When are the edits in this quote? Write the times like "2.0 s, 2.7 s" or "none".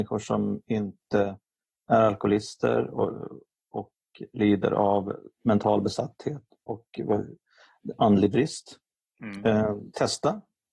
none

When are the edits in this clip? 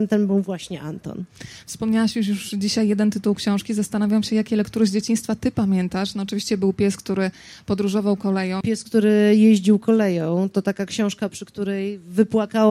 8.6 s, 10.5 s

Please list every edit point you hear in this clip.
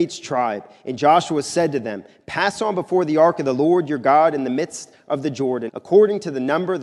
5.7 s

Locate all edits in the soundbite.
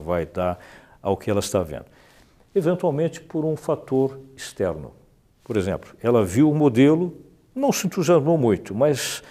none

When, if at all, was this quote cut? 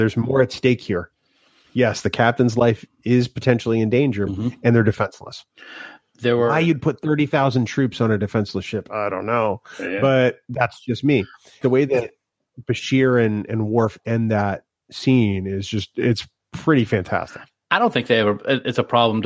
4.3 s, 11.6 s

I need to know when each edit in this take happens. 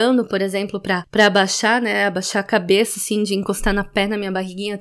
none

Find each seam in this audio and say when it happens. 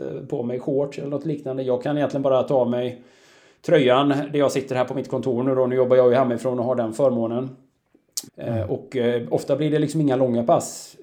8.3 s

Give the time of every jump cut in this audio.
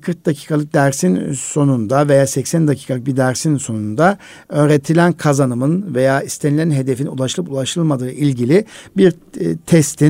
none

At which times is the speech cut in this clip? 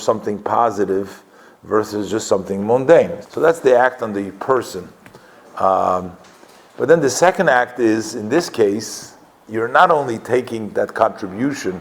3.2 s

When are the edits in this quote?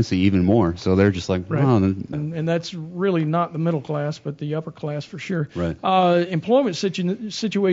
2.1 s

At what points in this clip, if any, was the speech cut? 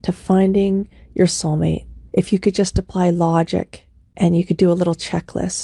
2.1 s

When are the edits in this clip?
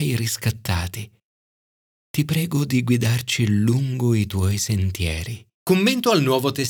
5.6 s

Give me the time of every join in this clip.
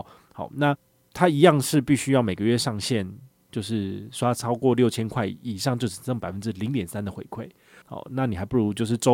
7.8 s

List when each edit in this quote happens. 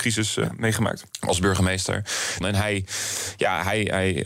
1.1 s, 2.4 s

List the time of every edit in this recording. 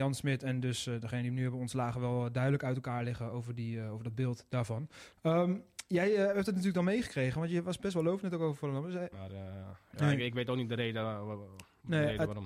9.1 s

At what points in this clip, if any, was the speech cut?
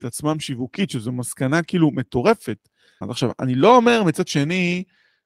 3.0 s

